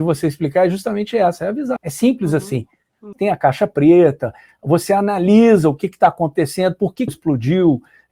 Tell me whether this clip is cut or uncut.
cut